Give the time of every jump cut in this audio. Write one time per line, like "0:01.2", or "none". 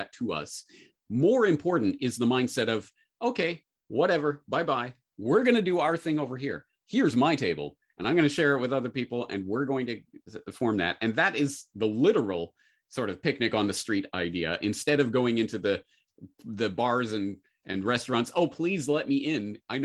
0:06.8